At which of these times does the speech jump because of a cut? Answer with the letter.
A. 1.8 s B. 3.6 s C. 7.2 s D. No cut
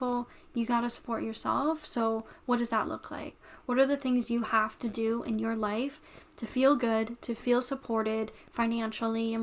D